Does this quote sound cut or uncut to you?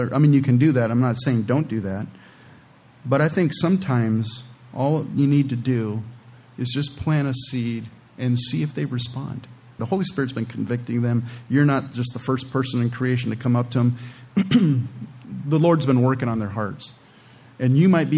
cut